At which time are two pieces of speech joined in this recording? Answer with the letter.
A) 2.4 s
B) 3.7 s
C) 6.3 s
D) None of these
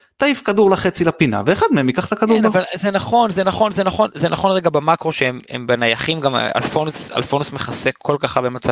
D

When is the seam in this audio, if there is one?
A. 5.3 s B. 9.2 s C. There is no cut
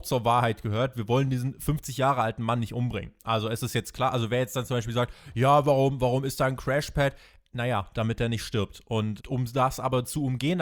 B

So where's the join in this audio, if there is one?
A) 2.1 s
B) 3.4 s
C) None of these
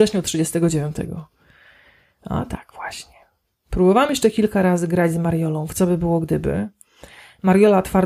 C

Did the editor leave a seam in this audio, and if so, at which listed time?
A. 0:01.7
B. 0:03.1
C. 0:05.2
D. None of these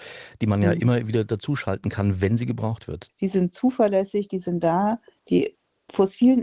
B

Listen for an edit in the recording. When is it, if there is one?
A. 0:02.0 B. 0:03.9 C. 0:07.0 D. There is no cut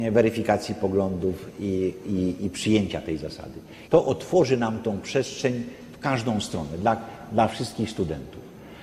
B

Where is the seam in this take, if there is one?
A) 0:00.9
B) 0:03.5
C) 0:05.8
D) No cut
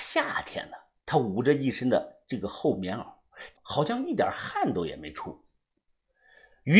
B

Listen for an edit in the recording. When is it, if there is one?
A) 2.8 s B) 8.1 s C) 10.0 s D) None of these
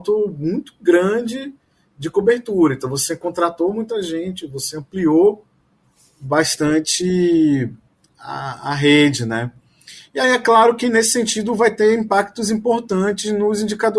D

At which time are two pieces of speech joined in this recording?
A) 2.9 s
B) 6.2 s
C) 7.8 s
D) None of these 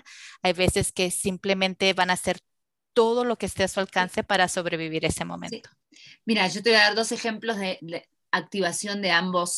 C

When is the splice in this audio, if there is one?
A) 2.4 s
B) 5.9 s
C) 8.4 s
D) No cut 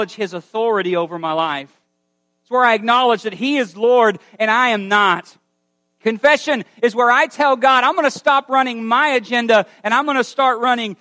D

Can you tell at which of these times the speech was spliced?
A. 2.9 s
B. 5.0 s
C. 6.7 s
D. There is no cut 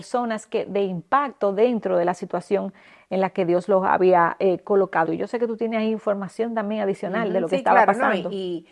B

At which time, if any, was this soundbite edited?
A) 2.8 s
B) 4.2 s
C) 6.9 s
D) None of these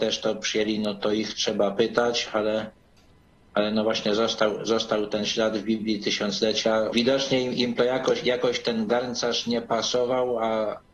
C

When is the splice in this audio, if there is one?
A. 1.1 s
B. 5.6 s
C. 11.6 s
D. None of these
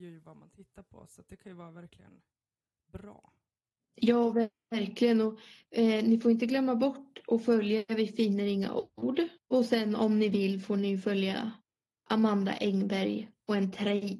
D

